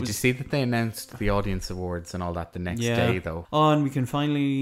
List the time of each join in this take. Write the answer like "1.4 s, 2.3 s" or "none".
3.5 s